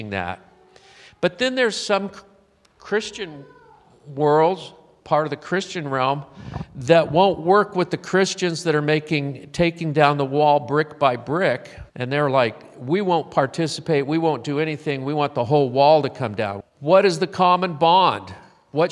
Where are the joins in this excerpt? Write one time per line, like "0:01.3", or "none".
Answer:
0:11.9
0:16.6